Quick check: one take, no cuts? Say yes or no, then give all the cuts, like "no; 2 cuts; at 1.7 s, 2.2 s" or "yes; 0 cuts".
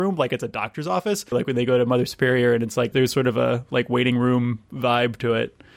no; 2 cuts; at 1.3 s, 2.9 s